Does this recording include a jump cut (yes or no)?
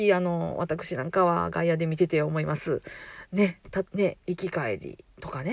yes